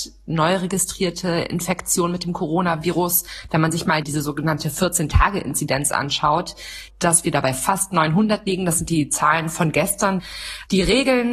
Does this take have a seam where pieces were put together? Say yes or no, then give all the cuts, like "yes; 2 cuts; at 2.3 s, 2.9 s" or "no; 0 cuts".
yes; 1 cut; at 6.9 s